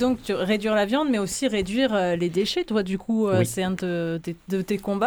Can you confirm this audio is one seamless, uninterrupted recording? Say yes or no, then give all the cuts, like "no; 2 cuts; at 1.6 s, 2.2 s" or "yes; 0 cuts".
yes; 0 cuts